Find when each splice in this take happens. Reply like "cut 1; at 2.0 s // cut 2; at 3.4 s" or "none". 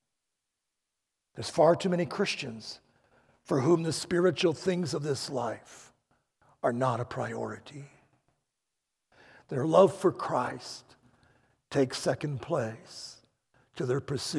none